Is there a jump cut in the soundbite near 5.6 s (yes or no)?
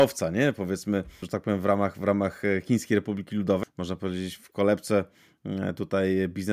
no